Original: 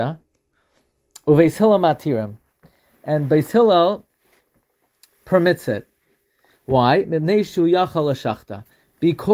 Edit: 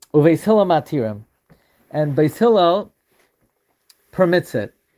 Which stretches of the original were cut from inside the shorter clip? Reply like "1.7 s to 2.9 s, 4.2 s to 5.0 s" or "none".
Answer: none